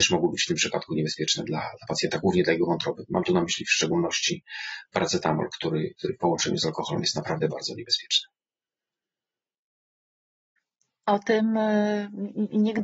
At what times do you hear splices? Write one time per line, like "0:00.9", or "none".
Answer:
0:07.5